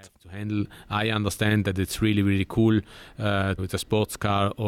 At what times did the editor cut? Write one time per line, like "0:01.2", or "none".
0:03.6